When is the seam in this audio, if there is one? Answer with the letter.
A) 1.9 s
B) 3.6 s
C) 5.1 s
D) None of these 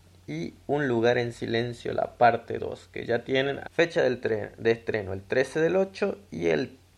B